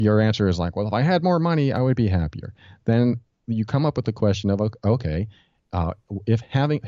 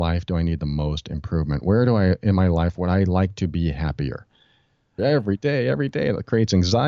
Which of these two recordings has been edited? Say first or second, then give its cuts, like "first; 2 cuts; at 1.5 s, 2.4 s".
second; 1 cut; at 5.0 s